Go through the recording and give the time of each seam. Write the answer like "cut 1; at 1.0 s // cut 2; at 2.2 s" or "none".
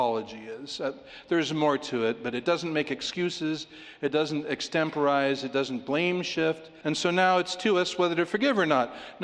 cut 1; at 6.8 s